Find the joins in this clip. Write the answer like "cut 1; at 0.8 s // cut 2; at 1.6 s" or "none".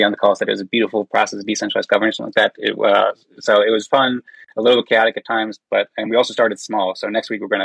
none